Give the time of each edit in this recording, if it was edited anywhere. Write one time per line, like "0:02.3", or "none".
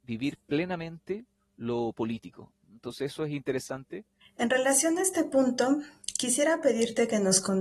0:04.2